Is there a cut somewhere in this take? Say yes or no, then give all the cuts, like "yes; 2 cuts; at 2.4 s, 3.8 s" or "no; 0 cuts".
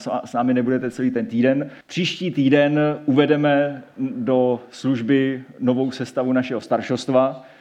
yes; 1 cut; at 1.8 s